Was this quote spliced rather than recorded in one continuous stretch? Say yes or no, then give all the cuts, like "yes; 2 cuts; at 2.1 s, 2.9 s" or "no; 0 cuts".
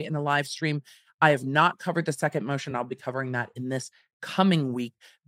no; 0 cuts